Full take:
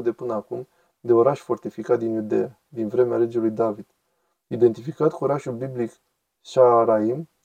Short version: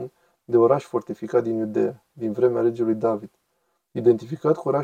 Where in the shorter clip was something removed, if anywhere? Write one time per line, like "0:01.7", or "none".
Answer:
none